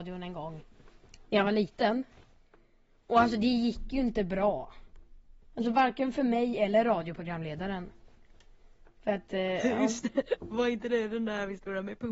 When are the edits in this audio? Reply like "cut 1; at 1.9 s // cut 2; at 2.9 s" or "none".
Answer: none

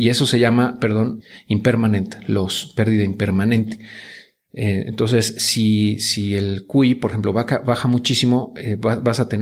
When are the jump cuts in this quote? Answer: cut 1; at 1.2 s

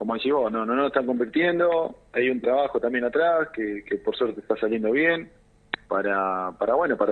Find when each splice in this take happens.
cut 1; at 5.8 s

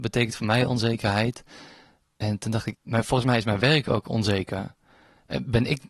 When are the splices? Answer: cut 1; at 2.7 s

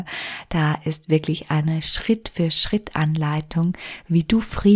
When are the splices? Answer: none

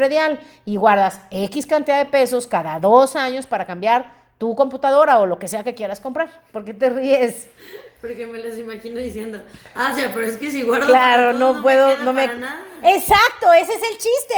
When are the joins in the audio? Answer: none

